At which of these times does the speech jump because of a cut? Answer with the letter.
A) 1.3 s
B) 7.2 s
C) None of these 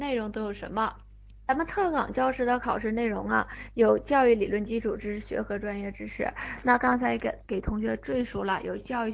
C